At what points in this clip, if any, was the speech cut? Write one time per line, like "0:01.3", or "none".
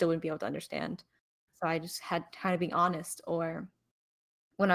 0:01.5